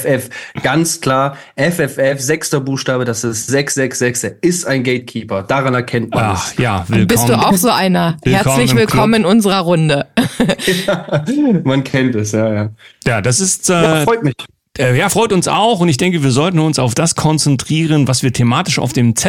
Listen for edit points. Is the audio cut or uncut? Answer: uncut